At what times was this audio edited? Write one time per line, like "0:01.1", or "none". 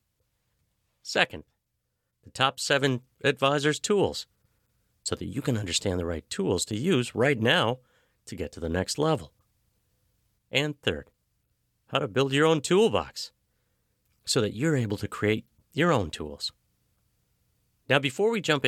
none